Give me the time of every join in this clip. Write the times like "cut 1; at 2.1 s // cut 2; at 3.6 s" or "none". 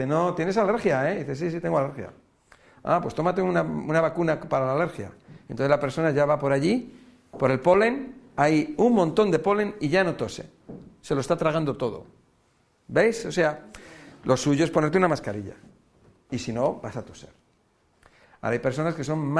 none